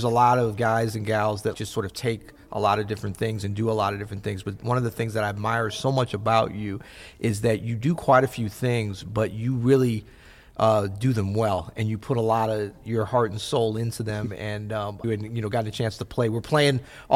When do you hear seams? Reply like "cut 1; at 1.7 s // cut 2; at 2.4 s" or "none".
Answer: cut 1; at 1.5 s // cut 2; at 15.0 s

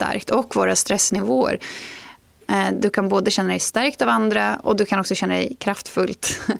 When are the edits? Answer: cut 1; at 2.4 s

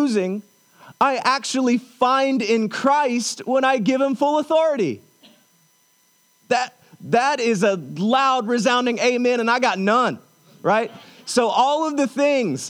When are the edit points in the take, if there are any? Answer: none

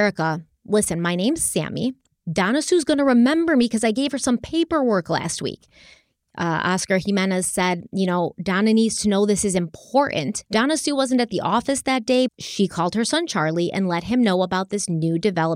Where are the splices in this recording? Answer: cut 1; at 10.5 s // cut 2; at 12.3 s

